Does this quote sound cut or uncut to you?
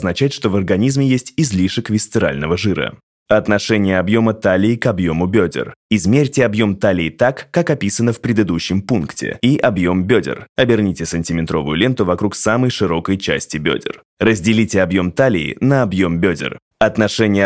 uncut